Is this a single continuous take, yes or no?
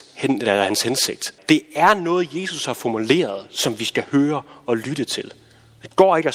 no